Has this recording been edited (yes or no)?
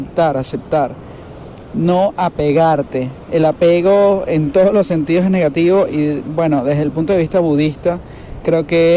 no